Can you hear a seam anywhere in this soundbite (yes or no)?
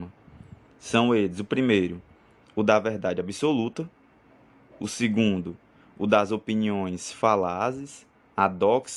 no